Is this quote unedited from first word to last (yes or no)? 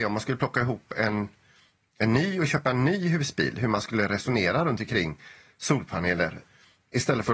yes